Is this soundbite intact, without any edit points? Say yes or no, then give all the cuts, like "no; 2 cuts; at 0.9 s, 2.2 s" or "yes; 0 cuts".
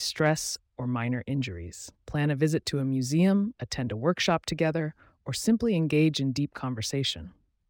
no; 1 cut; at 1.9 s